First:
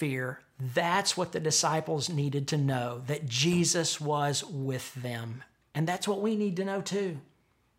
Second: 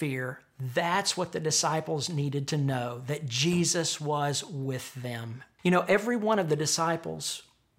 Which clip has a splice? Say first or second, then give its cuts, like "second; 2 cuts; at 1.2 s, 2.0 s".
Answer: second; 1 cut; at 5.6 s